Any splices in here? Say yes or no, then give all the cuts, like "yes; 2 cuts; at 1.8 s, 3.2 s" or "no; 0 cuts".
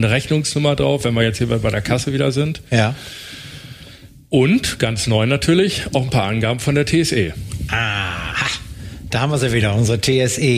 no; 0 cuts